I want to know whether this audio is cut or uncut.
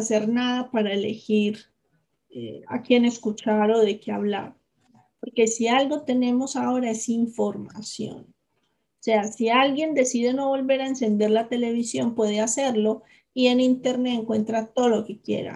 uncut